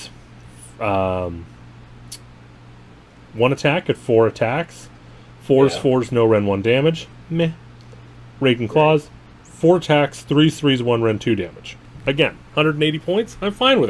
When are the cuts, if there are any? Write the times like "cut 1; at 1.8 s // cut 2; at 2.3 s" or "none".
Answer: none